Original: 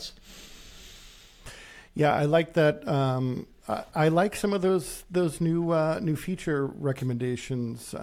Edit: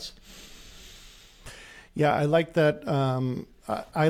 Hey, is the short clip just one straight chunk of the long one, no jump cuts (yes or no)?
yes